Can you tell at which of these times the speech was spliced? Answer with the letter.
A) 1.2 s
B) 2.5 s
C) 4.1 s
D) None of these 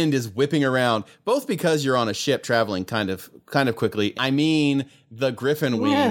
C